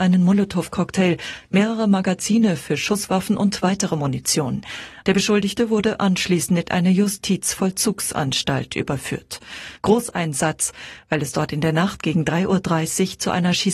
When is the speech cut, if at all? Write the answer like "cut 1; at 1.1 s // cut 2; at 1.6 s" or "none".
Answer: cut 1; at 5.0 s // cut 2; at 9.8 s